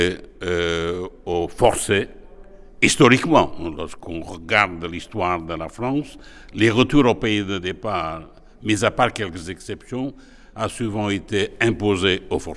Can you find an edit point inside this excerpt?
no; 0 cuts

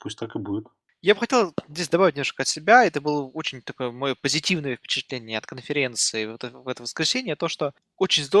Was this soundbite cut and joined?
no; 0 cuts

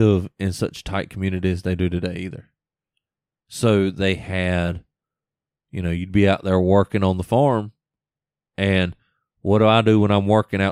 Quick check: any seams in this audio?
no; 0 cuts

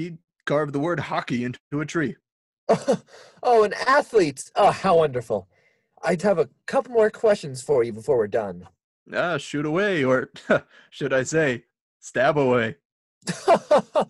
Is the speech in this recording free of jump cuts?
no; 1 cut; at 6.2 s

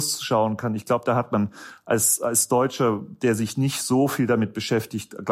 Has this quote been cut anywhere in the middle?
no; 0 cuts

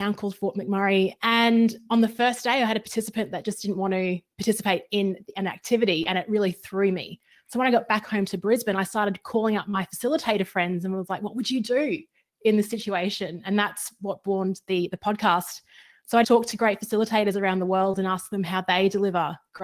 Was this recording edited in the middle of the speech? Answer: yes; 1 cut; at 16.2 s

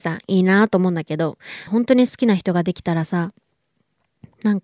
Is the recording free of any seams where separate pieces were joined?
no; 1 cut; at 1.7 s

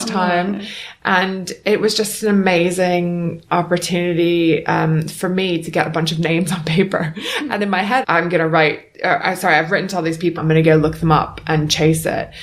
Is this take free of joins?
no; 2 cuts; at 8.0 s, 10.4 s

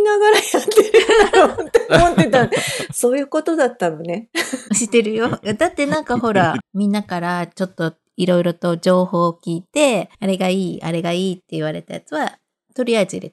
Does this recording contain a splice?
yes; 3 cuts; at 4.7 s, 6.6 s, 10.1 s

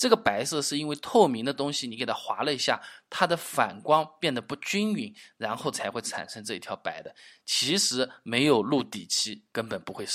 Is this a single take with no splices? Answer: yes; 0 cuts

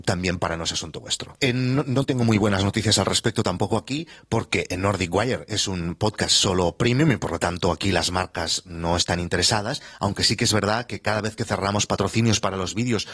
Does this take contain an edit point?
yes; 1 cut; at 1.3 s

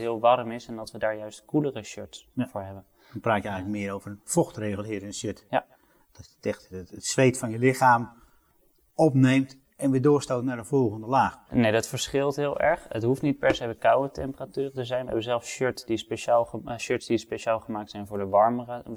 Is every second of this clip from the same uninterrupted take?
no; 2 cuts; at 6.9 s, 11.5 s

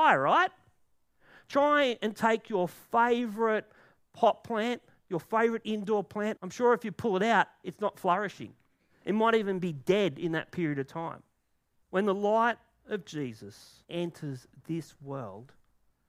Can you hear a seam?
yes; 3 cuts; at 6.4 s, 11.8 s, 13.8 s

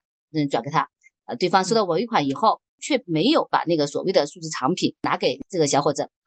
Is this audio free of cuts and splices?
yes; 0 cuts

